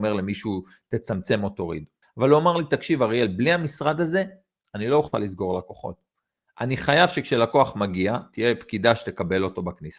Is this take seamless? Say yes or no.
no